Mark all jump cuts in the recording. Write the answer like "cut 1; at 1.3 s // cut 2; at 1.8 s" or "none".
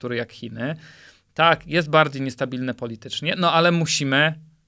none